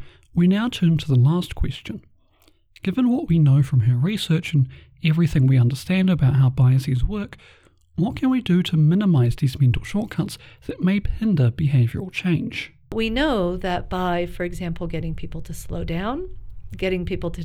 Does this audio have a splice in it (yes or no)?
no